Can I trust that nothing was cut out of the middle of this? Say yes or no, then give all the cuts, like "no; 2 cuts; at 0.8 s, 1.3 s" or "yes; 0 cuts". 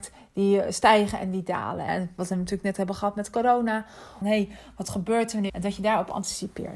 no; 3 cuts; at 1.9 s, 4.2 s, 5.5 s